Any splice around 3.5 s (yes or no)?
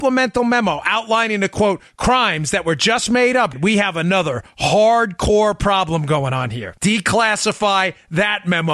yes